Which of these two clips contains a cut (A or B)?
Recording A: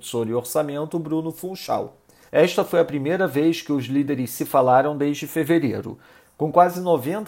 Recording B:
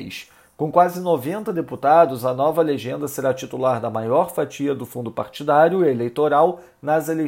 A